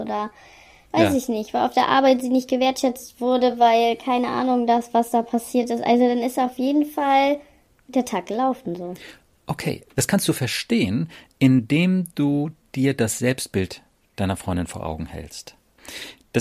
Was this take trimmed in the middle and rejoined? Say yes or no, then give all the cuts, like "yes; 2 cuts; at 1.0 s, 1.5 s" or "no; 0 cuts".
no; 0 cuts